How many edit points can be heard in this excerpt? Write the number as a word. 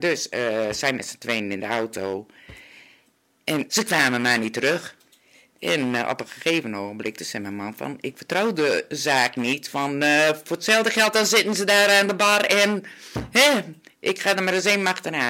zero